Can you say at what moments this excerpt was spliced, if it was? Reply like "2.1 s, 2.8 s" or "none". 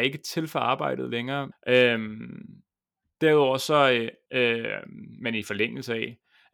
1.5 s, 4.3 s